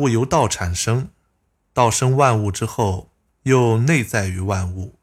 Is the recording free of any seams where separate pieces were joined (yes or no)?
yes